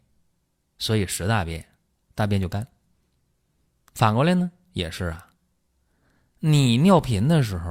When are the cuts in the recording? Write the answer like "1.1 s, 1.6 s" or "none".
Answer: 2.1 s

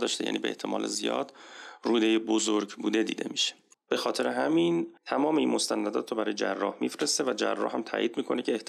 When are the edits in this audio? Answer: 3.8 s, 5.0 s

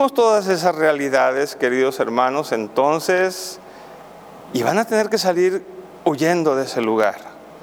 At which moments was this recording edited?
4.5 s

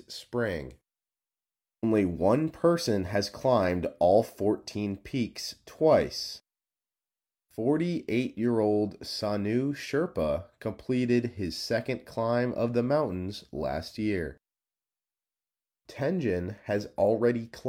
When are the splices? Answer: 1.8 s

